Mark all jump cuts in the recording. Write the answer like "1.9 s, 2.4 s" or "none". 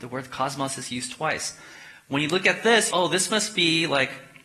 2.9 s